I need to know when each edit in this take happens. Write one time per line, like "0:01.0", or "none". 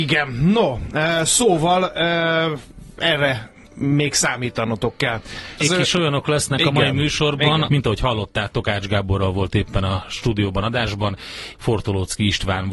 0:05.6
0:07.7
0:11.5

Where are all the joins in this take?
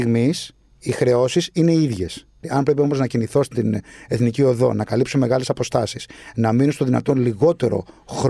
0:02.4

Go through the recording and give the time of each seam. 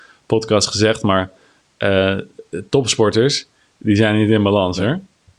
none

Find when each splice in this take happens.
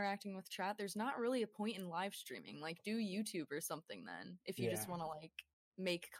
none

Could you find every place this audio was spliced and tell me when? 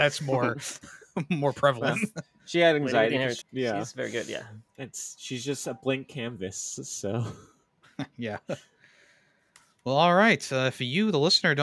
0:03.4
0:04.7

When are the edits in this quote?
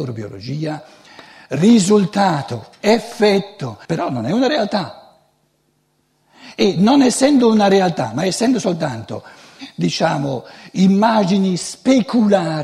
0:03.9

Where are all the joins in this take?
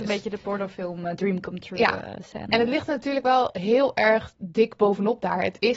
none

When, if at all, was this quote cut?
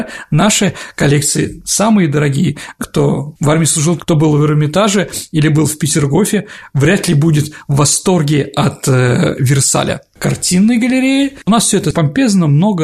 0:02.8
0:04.0

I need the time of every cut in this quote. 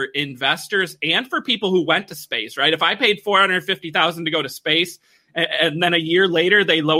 none

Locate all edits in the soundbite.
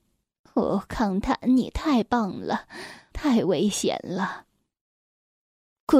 0:03.1

